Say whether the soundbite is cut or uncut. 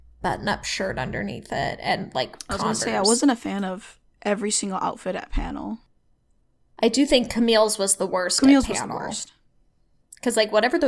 uncut